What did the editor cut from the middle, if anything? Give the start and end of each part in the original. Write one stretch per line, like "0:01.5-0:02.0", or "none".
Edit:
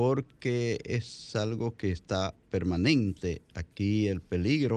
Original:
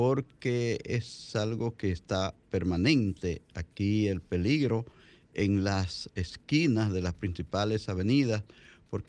none